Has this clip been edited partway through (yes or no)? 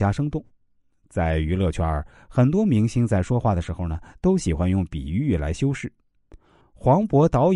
yes